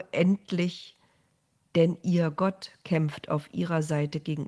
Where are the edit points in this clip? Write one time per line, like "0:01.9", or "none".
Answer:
0:01.7